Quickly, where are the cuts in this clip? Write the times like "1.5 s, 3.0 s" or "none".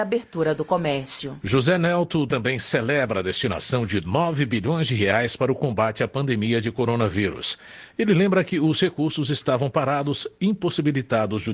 2.3 s